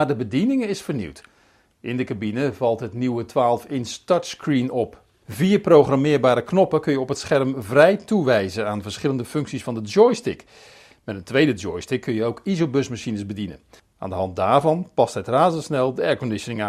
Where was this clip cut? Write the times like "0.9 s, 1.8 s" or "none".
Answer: 13.8 s